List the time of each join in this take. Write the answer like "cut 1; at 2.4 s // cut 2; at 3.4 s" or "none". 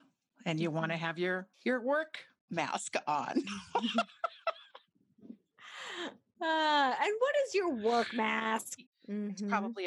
cut 1; at 1.5 s // cut 2; at 8.9 s